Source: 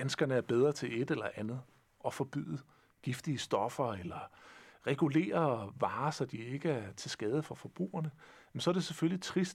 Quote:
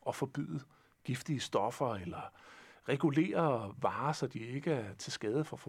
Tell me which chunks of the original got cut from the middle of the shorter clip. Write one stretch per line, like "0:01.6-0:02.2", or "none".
none